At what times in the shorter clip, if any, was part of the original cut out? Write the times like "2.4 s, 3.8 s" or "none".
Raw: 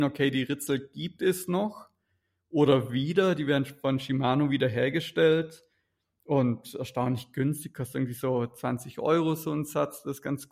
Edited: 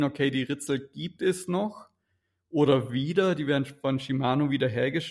none